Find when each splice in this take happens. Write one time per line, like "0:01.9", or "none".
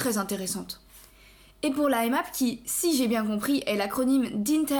none